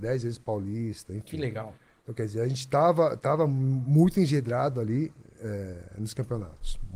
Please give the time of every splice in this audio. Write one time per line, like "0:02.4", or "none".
none